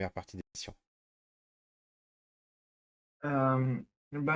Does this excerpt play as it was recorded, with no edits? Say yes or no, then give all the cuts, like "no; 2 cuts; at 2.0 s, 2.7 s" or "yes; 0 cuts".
yes; 0 cuts